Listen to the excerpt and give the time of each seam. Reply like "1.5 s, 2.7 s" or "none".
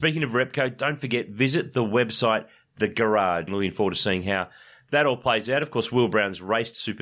3.5 s